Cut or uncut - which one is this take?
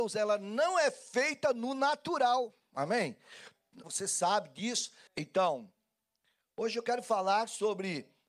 cut